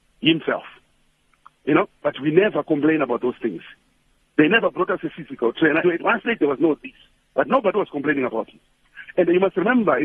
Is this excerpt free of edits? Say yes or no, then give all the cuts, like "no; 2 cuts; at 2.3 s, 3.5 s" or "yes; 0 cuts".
no; 1 cut; at 5.8 s